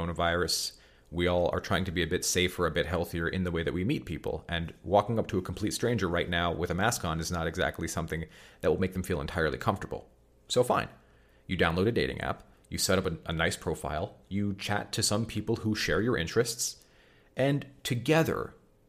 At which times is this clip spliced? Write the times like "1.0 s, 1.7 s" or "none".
none